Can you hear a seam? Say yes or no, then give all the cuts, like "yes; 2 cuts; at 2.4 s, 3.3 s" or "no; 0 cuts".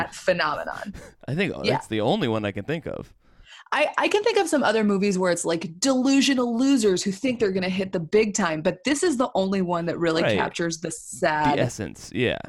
no; 0 cuts